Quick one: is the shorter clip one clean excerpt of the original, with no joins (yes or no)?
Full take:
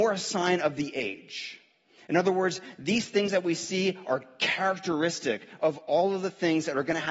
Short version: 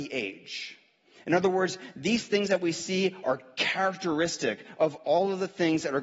yes